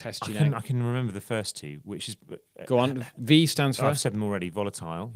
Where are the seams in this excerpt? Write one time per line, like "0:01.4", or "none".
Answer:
none